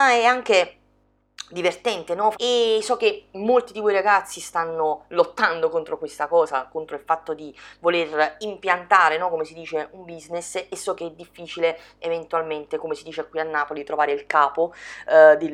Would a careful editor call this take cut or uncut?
cut